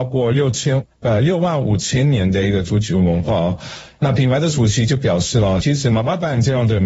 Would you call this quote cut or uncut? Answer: uncut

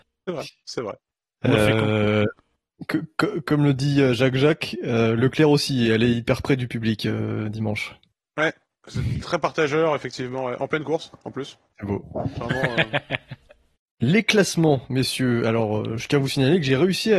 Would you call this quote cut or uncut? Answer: uncut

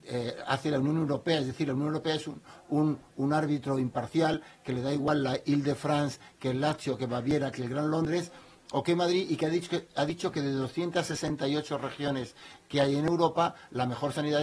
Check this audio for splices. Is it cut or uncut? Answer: uncut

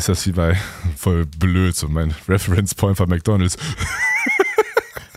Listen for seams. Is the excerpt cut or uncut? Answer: cut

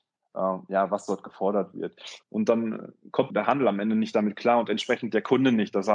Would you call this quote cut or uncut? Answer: cut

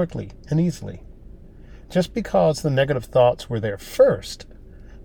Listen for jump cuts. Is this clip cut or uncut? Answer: uncut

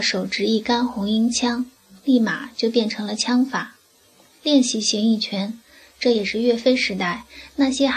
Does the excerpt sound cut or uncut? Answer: uncut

